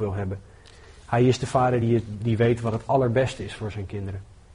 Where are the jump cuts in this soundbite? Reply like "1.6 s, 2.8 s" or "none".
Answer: none